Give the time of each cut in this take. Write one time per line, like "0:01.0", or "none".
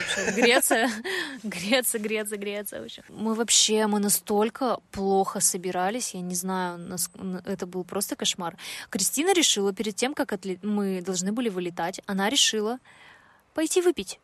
none